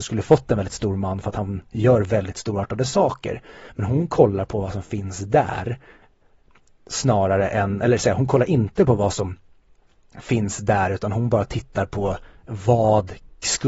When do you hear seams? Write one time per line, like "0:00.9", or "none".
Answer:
none

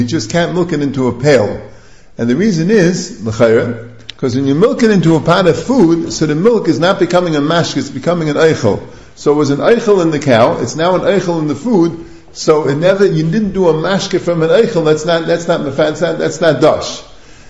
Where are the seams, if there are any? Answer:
none

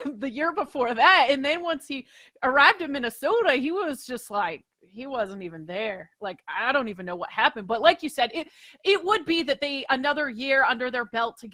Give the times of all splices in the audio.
none

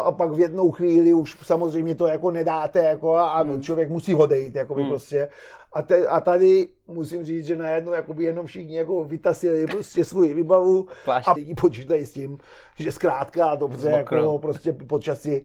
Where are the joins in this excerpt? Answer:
0:05.6
0:11.4

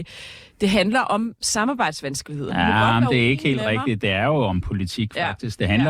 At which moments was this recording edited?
none

